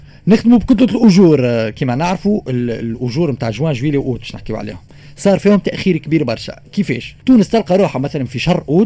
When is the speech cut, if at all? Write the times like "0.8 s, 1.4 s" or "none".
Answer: 7.2 s